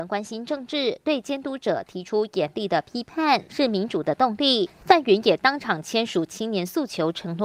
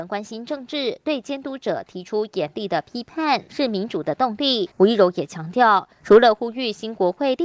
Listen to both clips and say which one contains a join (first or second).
second